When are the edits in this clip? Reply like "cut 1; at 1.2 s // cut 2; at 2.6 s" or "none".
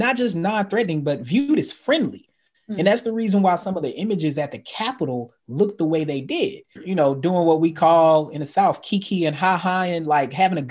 cut 1; at 6.8 s